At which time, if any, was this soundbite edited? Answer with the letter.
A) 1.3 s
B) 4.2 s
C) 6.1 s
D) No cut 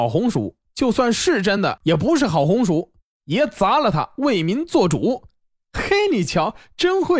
B